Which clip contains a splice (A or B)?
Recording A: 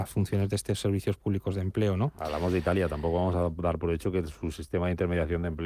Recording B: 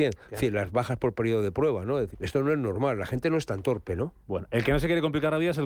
B